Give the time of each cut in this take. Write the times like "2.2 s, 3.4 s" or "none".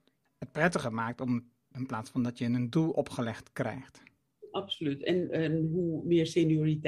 1.7 s